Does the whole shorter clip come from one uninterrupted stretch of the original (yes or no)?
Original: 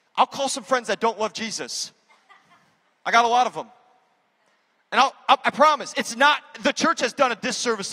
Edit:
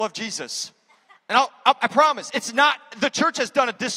no